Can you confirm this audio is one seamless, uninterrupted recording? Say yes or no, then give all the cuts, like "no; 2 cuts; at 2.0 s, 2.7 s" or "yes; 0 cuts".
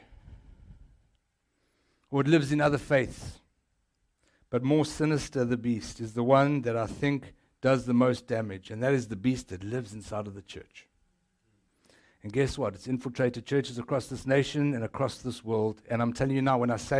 yes; 0 cuts